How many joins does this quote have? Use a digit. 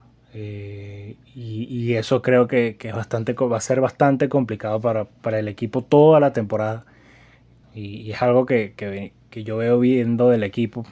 1